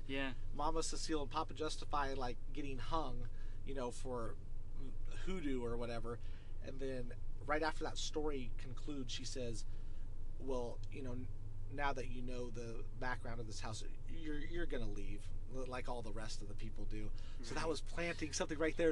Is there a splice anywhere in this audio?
no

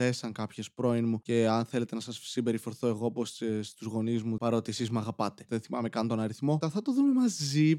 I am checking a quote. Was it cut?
yes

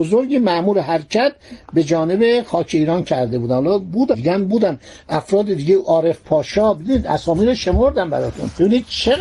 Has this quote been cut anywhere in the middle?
no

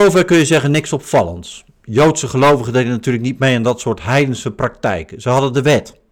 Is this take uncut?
yes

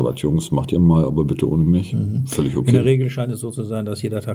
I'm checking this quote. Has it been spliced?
no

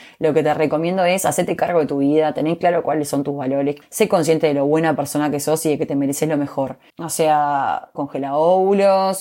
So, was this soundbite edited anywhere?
yes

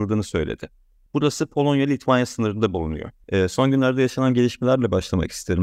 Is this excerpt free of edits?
no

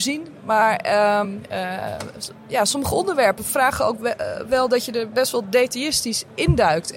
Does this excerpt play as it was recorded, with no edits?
no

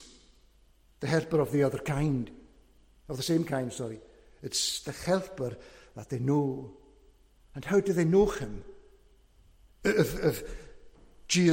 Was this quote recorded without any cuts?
yes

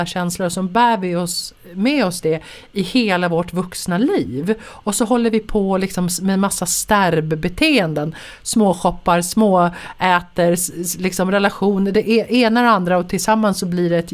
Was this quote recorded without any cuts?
yes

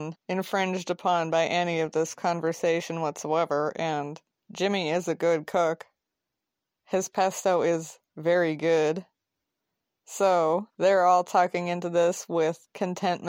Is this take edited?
no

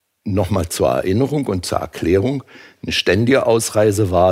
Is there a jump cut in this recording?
no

